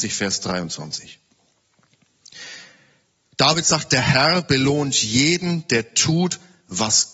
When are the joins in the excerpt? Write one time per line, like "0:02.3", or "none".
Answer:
none